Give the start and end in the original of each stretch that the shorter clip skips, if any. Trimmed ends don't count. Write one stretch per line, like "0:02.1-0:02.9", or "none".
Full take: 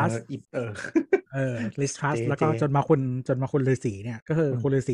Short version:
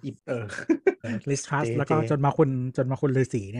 0:01.3-0:01.5